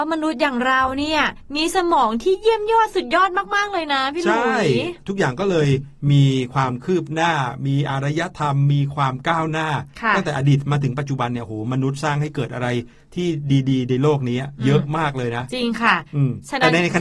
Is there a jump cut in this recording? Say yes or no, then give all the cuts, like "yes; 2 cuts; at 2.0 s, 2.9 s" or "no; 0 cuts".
no; 0 cuts